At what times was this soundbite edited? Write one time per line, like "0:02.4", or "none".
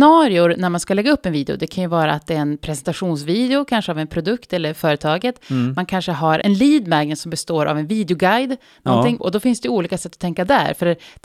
0:06.4
0:09.2